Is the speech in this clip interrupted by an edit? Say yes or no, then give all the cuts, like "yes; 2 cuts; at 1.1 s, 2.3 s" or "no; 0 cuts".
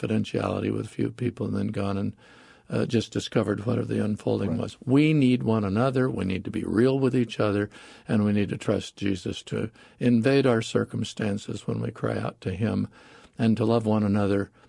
no; 0 cuts